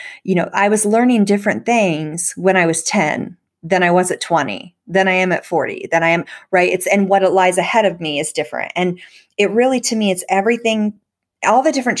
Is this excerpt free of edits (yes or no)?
yes